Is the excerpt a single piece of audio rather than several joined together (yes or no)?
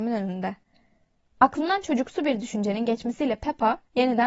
yes